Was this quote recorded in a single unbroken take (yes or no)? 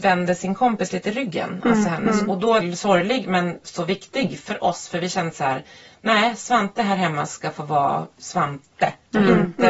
no